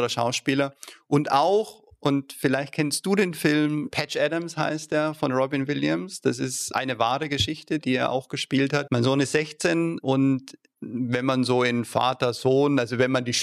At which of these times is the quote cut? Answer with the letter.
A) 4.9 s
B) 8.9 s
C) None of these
B